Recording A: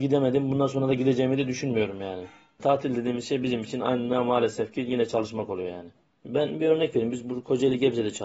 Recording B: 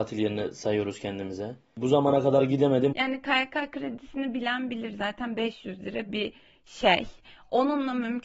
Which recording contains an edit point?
B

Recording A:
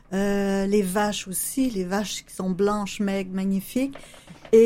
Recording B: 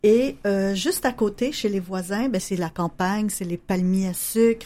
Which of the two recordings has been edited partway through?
B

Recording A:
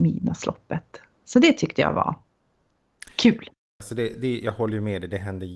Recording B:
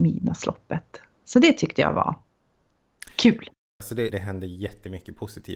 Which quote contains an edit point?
B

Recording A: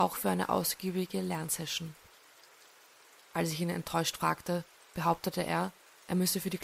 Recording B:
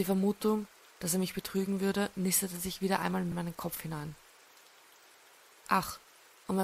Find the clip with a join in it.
A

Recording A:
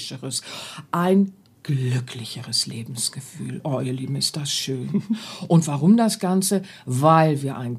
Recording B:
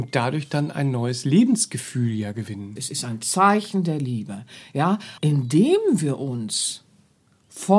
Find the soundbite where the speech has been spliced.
B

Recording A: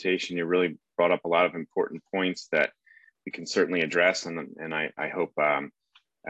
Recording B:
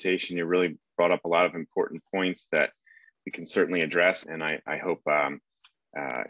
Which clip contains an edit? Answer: B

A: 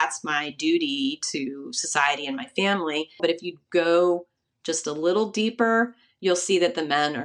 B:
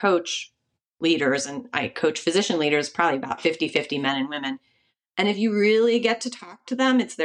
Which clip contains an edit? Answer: A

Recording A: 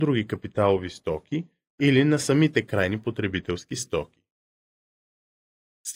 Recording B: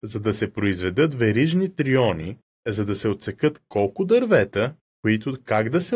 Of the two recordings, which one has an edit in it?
B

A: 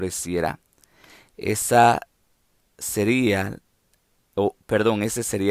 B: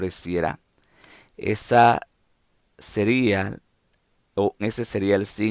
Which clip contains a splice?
B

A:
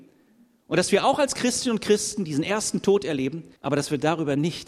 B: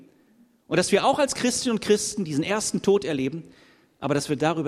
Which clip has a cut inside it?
A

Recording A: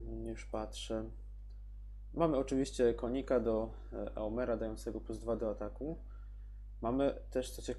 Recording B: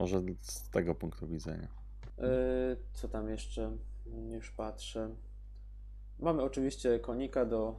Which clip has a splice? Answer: B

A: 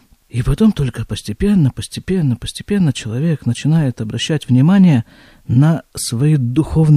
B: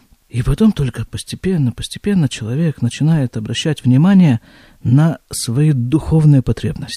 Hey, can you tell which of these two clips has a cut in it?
B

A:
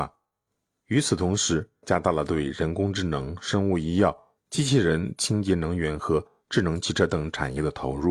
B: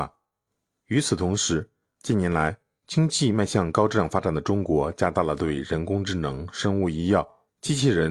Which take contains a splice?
A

